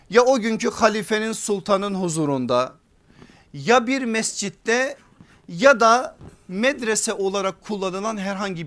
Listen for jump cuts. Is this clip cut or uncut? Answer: uncut